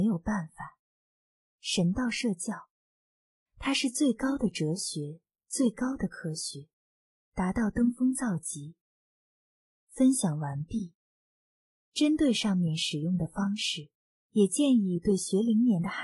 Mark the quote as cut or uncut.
cut